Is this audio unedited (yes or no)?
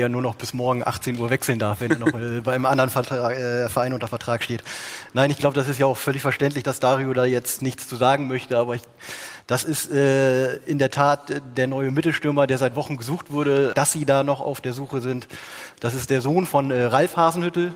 no